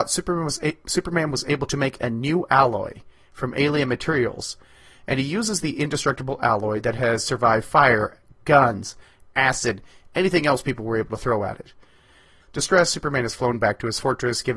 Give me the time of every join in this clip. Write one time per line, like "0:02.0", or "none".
0:12.4

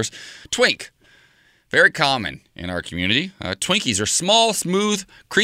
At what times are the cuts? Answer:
none

